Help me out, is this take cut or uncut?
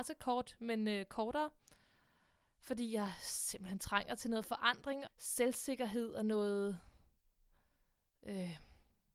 cut